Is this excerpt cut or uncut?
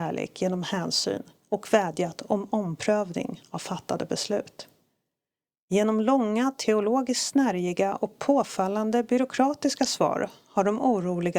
uncut